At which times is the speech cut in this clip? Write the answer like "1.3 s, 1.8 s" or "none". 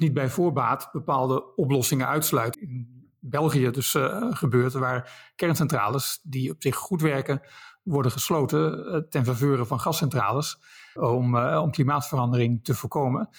2.5 s, 11.0 s